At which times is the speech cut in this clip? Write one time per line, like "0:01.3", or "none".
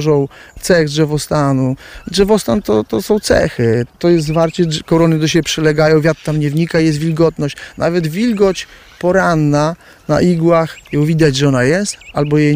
0:03.9